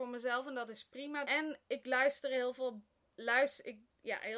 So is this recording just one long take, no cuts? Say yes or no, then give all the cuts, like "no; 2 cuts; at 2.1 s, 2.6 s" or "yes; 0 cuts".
no; 1 cut; at 1.2 s